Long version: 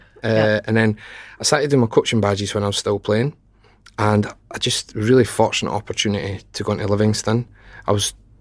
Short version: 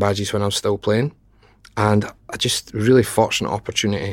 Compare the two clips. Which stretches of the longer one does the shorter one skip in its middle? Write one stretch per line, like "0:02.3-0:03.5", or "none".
none